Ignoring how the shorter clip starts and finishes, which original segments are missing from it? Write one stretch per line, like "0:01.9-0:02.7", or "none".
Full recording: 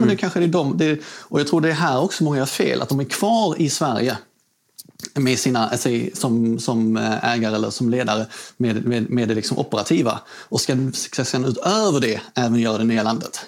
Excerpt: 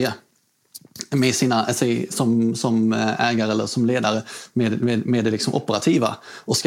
none